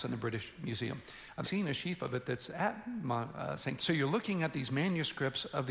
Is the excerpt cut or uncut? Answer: cut